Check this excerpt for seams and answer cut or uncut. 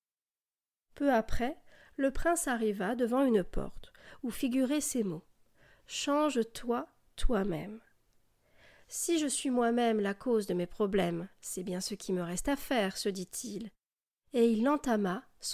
uncut